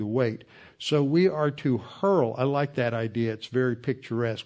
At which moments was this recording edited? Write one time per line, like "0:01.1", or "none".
none